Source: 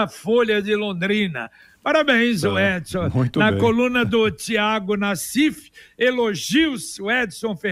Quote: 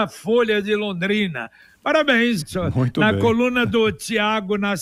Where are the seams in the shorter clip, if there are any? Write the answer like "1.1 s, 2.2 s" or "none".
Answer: 2.4 s